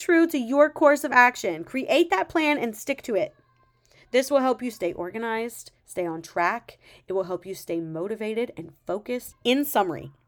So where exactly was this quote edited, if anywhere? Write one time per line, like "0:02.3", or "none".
0:09.3

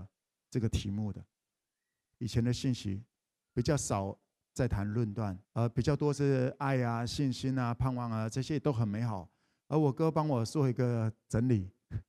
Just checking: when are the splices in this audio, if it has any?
0:05.5

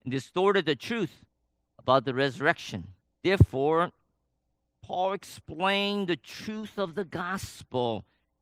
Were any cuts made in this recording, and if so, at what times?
0:03.1

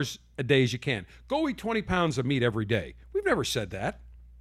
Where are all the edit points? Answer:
none

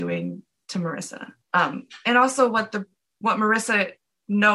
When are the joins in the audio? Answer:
0:01.4

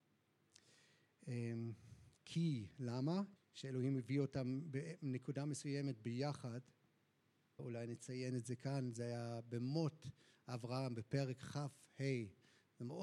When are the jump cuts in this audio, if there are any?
0:03.4
0:07.6

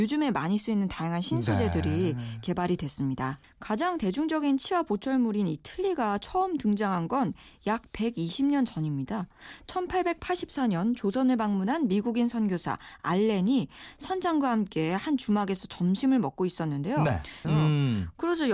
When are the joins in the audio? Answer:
0:03.4
0:17.4

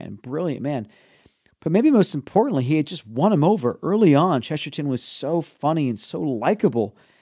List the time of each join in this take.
none

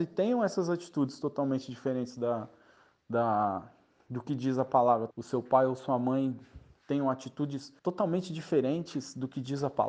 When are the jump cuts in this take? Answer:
0:05.1
0:07.8

